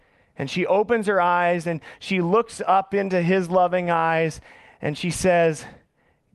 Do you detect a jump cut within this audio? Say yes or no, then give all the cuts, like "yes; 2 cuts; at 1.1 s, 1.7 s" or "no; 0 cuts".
no; 0 cuts